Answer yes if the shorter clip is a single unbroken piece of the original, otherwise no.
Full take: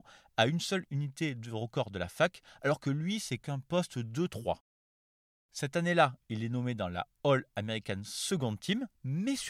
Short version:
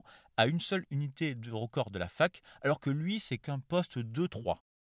yes